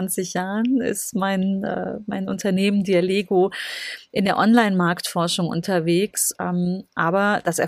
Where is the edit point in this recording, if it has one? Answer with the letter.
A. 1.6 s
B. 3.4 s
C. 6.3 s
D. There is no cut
C